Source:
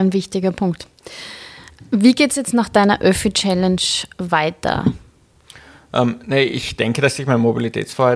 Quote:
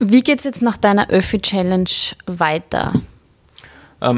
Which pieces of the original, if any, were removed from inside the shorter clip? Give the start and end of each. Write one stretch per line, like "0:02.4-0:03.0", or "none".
none